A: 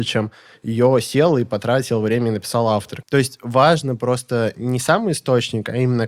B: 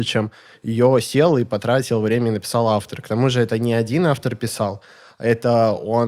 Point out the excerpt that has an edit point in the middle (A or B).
A